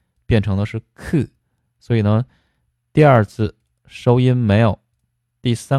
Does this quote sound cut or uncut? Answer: uncut